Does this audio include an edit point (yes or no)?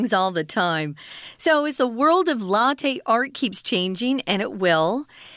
no